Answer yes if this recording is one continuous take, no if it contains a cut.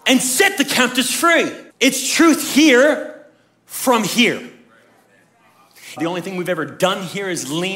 no